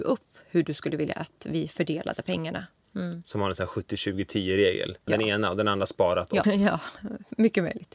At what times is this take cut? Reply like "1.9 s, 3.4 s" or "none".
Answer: 2.8 s, 5.1 s, 6.4 s